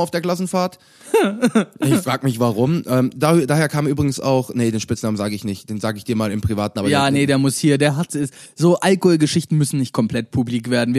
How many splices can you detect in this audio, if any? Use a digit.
0